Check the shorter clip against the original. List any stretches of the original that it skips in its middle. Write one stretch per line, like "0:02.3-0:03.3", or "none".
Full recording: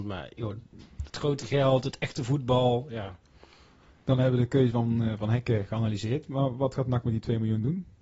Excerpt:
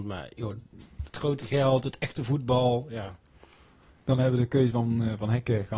none